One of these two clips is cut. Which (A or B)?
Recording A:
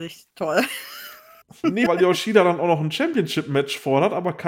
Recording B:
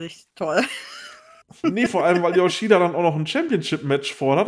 A